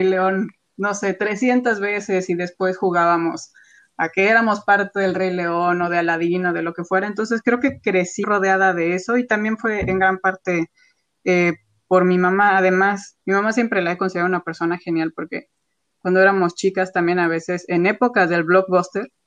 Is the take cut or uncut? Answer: cut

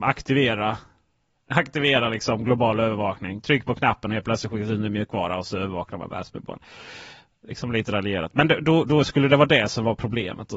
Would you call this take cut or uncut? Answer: uncut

